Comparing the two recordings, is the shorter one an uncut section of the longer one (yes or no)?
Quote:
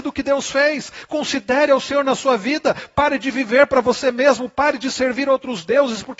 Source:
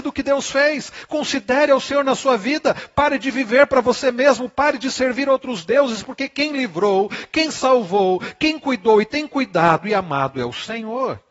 yes